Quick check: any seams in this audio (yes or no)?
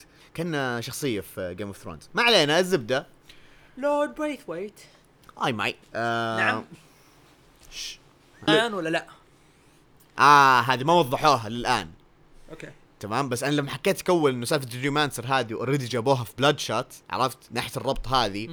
yes